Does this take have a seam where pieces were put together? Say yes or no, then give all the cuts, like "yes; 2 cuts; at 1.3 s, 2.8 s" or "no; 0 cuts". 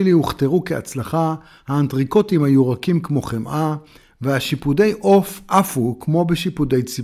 no; 0 cuts